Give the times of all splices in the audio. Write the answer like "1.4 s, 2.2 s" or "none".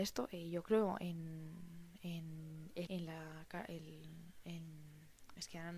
2.9 s